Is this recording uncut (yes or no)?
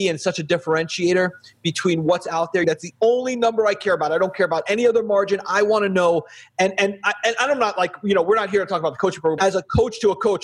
no